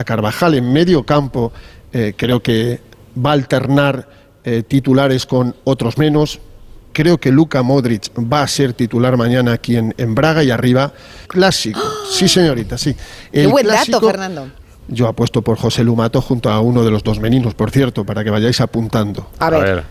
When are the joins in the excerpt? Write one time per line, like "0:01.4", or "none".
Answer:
0:11.2
0:14.8